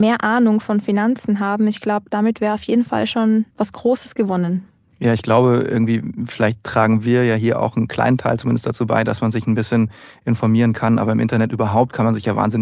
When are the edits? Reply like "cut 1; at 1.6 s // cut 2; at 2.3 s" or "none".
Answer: cut 1; at 3.5 s